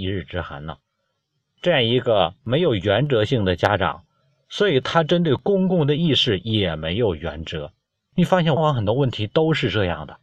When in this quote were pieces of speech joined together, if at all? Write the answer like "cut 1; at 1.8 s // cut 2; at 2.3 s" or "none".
cut 1; at 8.6 s